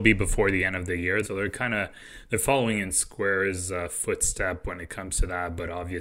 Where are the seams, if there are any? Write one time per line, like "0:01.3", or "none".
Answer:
0:01.2